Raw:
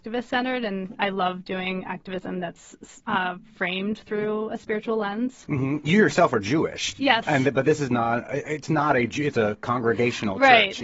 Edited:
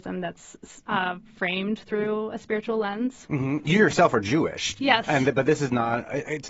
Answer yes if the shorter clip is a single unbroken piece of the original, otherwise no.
yes